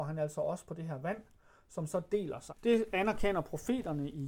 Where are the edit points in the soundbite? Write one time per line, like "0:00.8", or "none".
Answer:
0:02.5